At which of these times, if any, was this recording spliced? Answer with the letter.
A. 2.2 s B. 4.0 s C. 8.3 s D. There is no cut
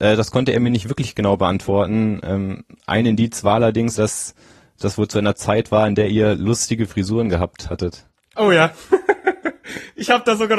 B